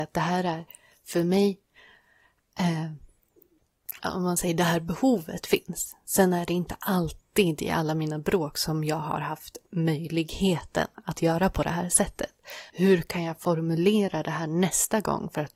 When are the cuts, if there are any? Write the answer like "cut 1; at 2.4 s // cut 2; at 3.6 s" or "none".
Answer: cut 1; at 4.0 s // cut 2; at 12.7 s